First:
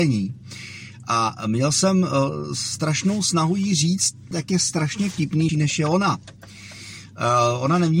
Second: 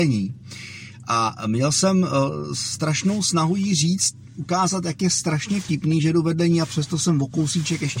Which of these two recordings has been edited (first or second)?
first